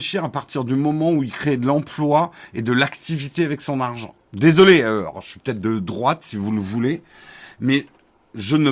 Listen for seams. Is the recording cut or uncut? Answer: cut